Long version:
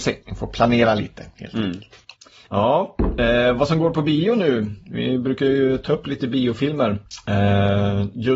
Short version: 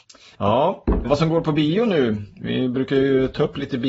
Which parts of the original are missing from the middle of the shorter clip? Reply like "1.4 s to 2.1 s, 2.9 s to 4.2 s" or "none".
3.2 s to 3.5 s